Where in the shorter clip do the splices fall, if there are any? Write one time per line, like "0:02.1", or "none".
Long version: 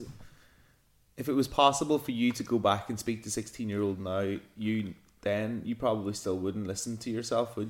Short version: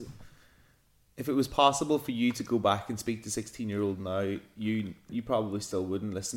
0:05.1